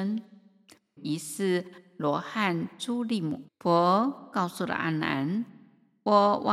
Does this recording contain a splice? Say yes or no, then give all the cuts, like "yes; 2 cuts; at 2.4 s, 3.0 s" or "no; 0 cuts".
yes; 2 cuts; at 1.0 s, 3.5 s